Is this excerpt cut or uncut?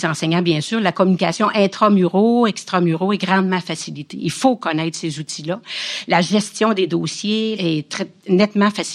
uncut